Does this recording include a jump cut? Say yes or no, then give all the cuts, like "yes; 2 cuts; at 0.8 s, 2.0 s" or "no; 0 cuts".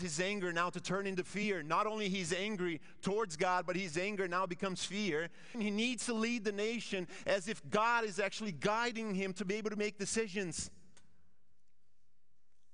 yes; 1 cut; at 5.5 s